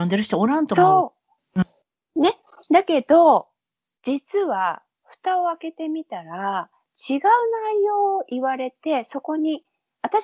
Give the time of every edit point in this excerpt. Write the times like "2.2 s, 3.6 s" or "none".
1.4 s